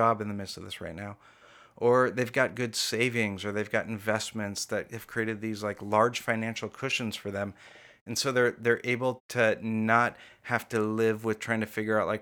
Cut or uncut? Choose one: cut